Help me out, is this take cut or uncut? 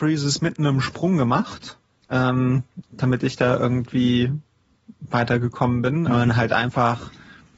cut